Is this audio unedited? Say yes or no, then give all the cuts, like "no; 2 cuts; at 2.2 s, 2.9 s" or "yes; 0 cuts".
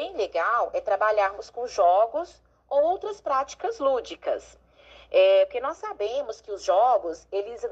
yes; 0 cuts